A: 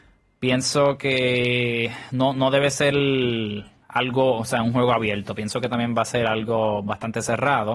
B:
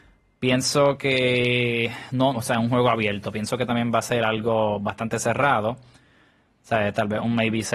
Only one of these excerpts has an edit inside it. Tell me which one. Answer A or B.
B